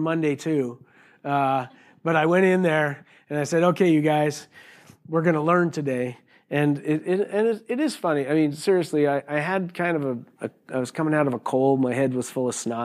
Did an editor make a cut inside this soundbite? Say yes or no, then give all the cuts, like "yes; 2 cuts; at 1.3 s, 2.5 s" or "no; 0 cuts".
no; 0 cuts